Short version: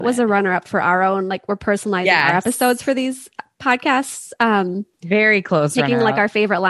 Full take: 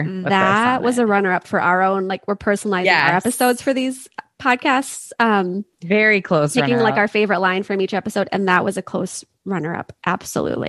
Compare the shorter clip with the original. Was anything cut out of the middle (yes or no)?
no